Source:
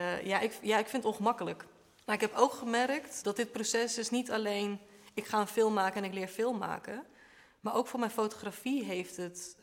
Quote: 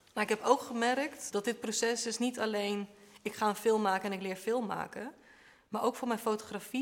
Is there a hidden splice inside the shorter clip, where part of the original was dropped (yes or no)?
no